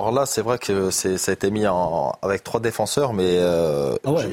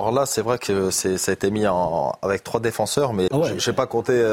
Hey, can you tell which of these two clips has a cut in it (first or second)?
second